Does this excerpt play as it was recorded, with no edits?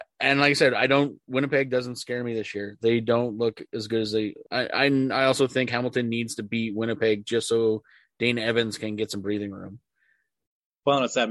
no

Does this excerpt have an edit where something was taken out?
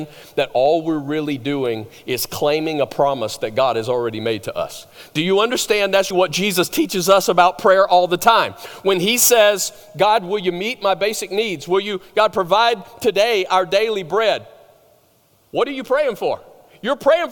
yes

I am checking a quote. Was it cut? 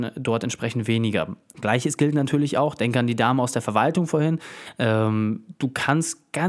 yes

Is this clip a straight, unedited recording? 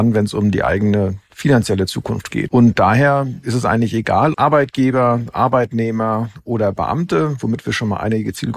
no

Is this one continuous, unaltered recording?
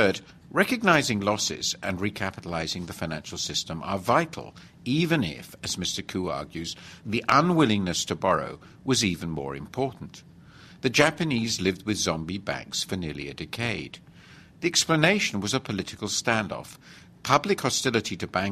yes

